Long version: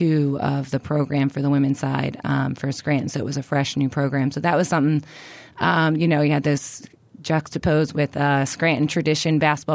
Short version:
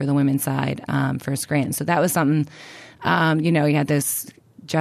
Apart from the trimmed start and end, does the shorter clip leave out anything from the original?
yes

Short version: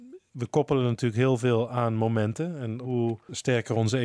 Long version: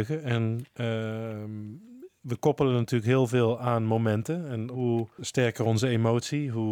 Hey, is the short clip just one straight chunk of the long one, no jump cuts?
yes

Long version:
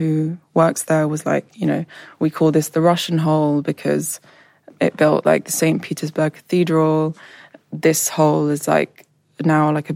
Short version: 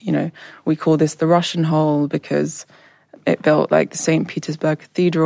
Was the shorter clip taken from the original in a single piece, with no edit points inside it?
yes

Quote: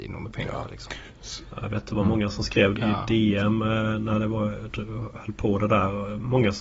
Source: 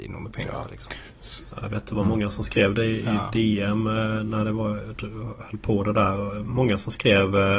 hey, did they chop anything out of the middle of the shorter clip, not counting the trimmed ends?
yes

